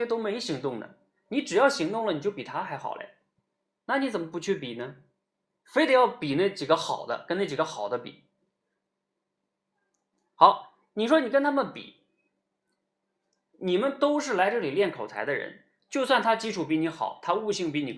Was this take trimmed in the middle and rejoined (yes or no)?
no